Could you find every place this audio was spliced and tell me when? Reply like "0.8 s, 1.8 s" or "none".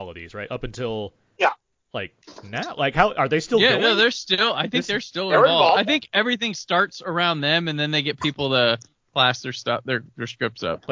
none